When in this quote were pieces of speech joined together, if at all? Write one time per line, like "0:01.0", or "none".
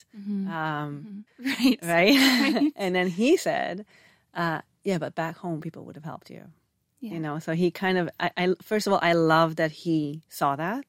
0:01.3

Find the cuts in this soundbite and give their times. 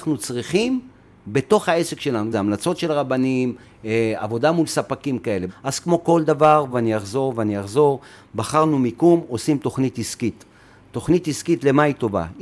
0:02.3
0:05.5
0:06.7

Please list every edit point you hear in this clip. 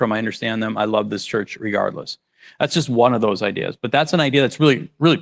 none

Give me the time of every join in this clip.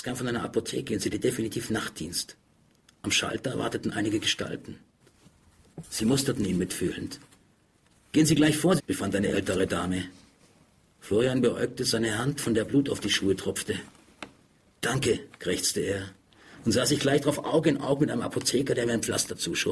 0:08.8

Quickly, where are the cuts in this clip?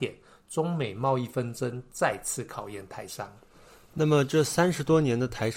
none

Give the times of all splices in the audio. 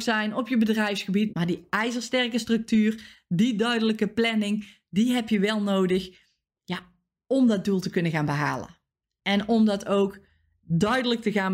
0:01.3

